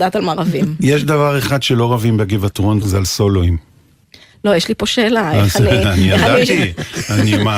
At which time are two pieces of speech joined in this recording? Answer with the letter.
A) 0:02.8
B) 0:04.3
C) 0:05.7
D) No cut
A